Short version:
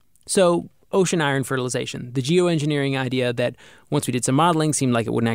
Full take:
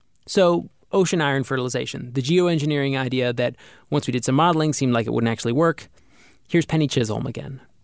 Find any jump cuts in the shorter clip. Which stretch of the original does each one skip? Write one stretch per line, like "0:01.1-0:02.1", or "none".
none